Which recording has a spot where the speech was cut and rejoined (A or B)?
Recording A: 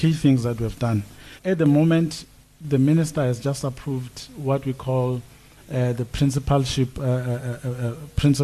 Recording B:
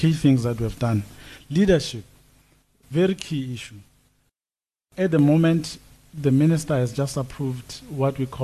A